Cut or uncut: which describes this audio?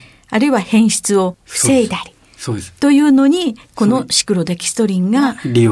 uncut